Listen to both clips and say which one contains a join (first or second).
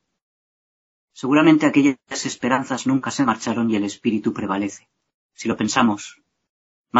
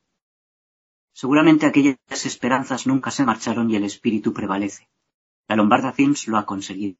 first